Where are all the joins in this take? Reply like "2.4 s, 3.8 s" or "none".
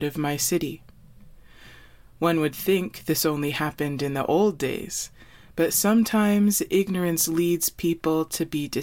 none